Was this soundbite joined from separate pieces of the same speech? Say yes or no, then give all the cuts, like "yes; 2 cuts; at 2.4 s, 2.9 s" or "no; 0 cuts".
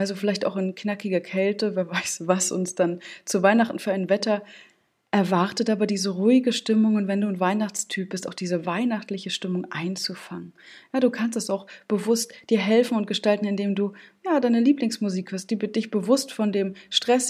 no; 0 cuts